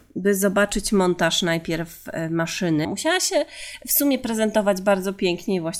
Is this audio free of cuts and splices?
no; 1 cut; at 2.8 s

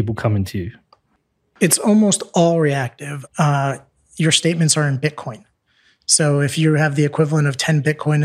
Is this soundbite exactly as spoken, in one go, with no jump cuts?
no; 1 cut; at 3.3 s

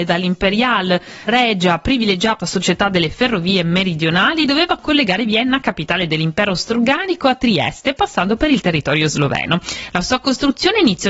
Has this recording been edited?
yes; 1 cut; at 1.3 s

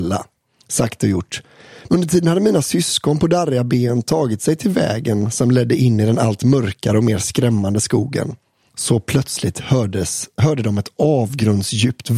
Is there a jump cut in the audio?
yes; 1 cut; at 1.9 s

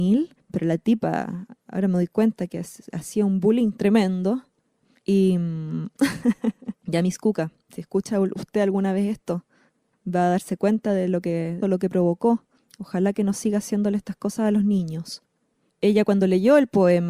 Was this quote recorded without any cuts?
no; 2 cuts; at 6.7 s, 11.6 s

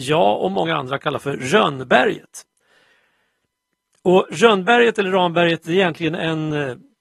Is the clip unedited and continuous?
yes; 0 cuts

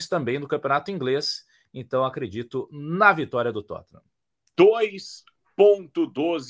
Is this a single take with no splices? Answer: no; 1 cut; at 4.5 s

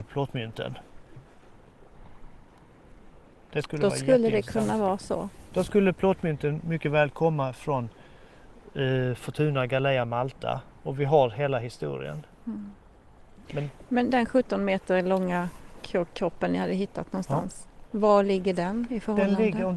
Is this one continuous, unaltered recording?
yes; 0 cuts

